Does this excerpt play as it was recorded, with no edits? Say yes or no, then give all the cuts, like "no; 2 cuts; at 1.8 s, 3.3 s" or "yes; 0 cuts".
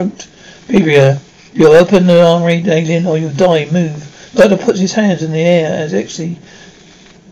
yes; 0 cuts